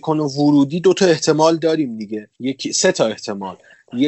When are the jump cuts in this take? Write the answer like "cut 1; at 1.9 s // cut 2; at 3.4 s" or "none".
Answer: cut 1; at 2.3 s